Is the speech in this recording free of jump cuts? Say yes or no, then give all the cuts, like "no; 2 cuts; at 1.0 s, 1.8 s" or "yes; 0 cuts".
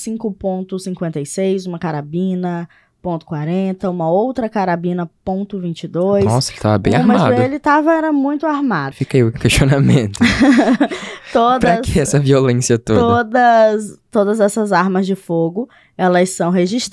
no; 1 cut; at 8.9 s